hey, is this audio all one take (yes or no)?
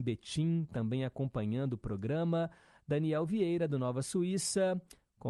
yes